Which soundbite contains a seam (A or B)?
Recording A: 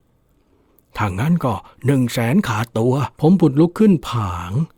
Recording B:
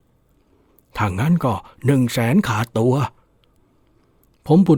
A